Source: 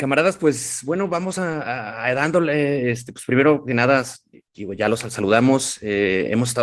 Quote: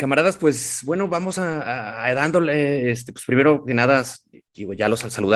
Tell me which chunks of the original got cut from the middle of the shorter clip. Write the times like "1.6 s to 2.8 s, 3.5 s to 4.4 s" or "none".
none